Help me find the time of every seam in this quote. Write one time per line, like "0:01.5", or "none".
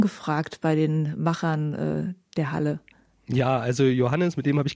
none